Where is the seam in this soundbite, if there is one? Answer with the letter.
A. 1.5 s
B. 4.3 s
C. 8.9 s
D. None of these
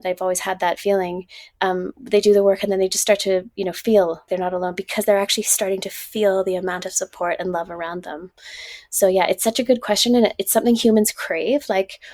B